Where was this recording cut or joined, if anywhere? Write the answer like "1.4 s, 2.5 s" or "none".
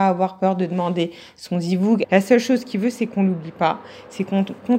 2.0 s